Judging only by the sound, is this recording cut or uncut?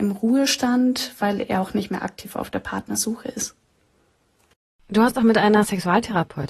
uncut